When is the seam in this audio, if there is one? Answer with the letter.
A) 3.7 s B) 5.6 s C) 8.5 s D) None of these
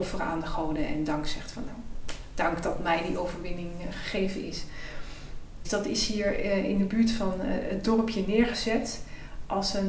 B